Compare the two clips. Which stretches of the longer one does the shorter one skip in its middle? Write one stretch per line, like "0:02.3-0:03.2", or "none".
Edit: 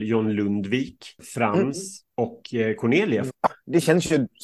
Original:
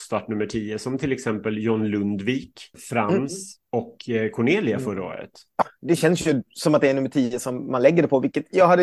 0:04.8-0:05.4

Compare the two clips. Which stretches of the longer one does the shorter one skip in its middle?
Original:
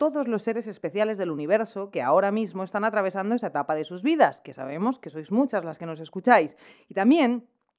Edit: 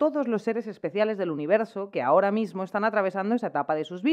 none

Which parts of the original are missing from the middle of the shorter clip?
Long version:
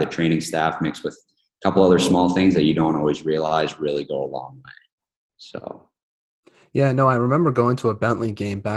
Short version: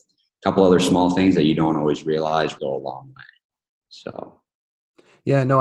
0:03.8-0:04.1

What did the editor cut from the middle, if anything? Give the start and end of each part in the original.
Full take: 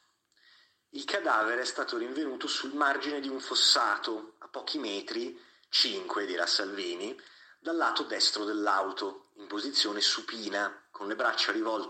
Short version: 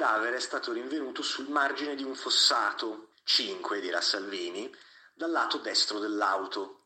0:04.4-0:05.6

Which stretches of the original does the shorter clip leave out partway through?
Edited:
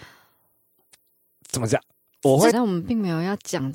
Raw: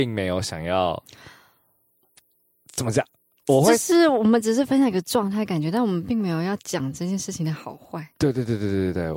0:03.8-0:05.7

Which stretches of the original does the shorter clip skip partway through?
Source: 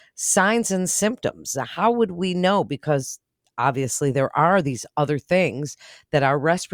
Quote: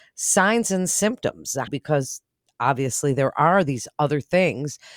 0:01.7-0:02.7

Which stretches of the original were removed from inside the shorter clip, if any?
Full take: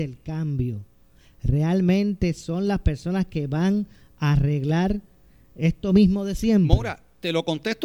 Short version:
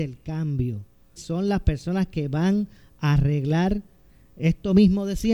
0:01.2-0:02.3

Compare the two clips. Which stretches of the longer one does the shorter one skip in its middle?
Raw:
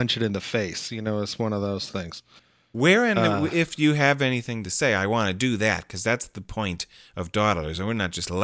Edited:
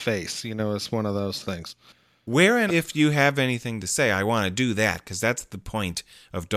0:03.1-0:03.5

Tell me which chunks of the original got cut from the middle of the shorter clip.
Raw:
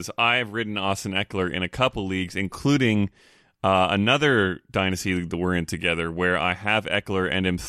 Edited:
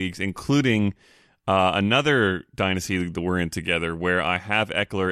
none

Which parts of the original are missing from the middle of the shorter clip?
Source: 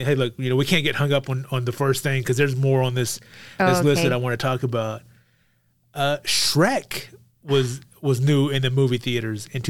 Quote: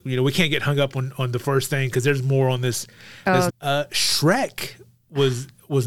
0:03.8-0:05.8

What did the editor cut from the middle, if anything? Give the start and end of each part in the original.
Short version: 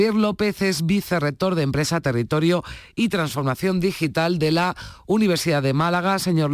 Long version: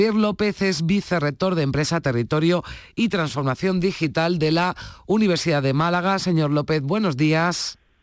none

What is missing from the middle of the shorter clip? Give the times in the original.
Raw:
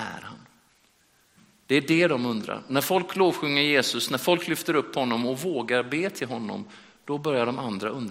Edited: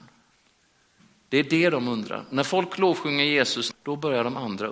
0:04.1-0:06.9

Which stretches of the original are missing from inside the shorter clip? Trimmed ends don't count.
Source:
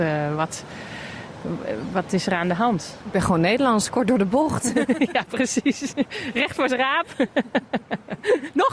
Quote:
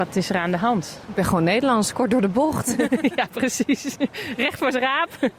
none

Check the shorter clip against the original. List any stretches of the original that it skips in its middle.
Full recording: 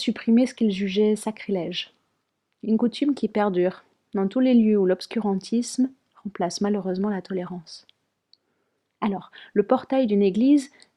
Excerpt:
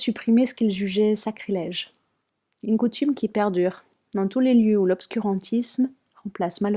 none

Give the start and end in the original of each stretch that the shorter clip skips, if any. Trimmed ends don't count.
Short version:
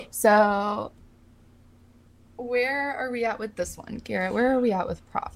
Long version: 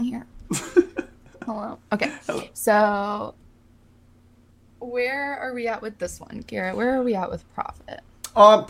none

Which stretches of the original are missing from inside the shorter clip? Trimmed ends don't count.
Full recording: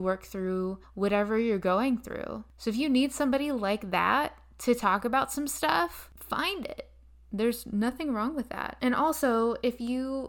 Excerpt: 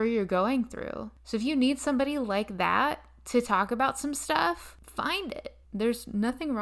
0:07.0-0:07.2

